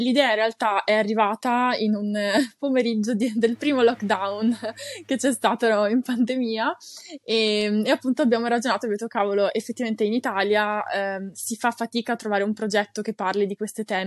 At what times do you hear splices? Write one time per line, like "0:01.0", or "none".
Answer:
none